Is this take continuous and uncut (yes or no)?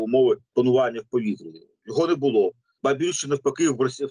yes